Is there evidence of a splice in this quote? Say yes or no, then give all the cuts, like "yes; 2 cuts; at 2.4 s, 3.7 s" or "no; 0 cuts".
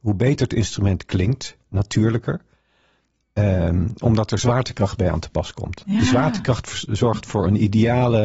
no; 0 cuts